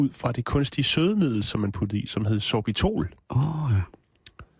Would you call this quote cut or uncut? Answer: uncut